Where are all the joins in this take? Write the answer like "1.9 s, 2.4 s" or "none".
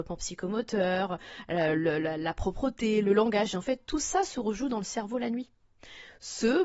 none